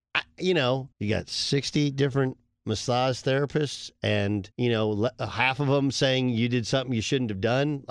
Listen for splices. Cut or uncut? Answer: cut